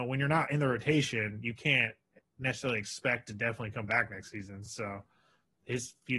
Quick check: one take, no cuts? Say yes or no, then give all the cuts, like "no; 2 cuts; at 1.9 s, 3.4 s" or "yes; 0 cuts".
yes; 0 cuts